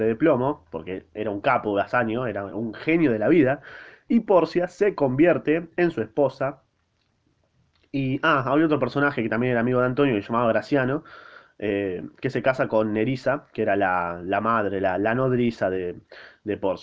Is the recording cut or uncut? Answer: uncut